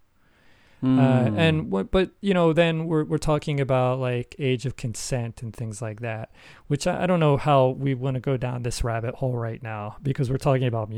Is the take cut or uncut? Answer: uncut